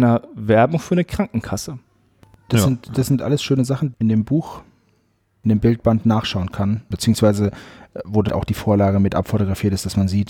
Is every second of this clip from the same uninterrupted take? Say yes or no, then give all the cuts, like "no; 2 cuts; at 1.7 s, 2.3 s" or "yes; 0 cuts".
no; 3 cuts; at 3.9 s, 6.9 s, 8.3 s